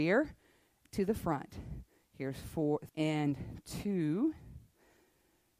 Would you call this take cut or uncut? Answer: cut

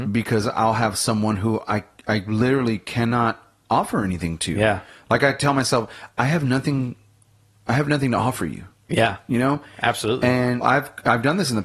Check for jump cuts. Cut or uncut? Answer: cut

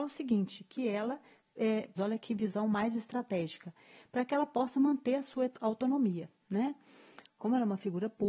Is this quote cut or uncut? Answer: cut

